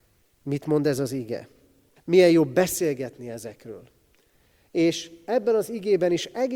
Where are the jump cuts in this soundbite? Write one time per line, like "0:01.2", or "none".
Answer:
0:02.0

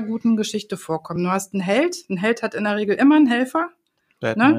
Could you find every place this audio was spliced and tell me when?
none

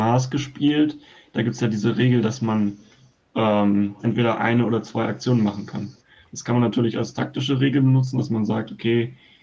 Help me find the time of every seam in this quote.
0:04.0

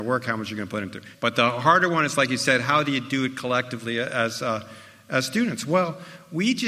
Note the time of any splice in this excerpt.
0:01.1

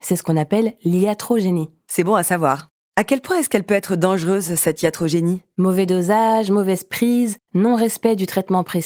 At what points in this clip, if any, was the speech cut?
none

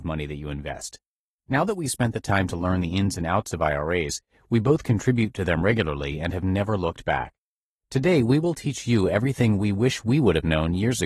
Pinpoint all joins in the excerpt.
none

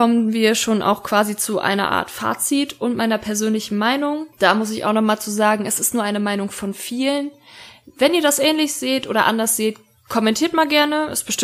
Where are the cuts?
none

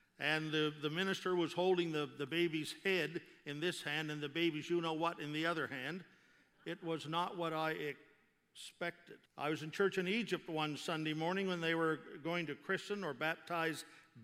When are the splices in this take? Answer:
0:06.5
0:09.3

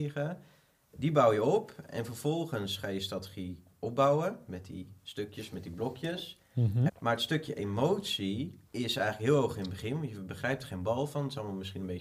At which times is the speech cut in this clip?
0:06.9
0:08.7

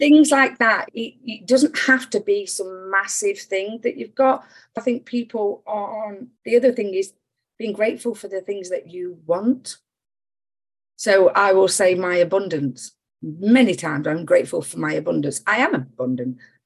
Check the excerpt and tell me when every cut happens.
0:04.8

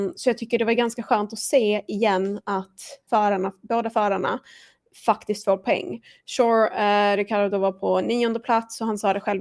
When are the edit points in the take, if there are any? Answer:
0:03.1

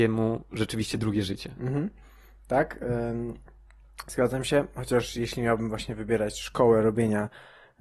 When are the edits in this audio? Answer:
none

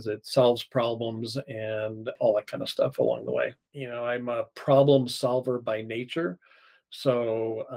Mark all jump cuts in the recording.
0:03.7

